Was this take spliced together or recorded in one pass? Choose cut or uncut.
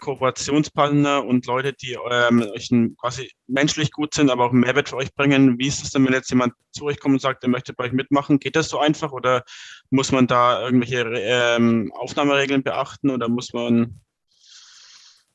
uncut